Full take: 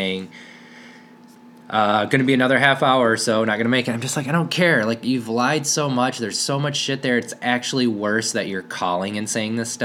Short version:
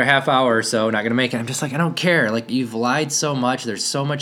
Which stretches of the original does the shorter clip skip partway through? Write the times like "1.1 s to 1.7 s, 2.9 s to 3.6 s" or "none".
none